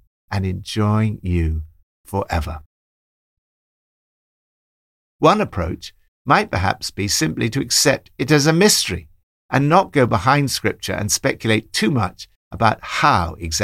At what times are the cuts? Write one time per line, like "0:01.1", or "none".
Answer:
0:05.1